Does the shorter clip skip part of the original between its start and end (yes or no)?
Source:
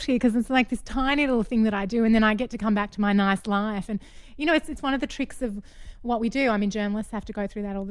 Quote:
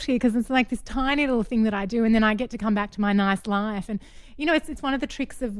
no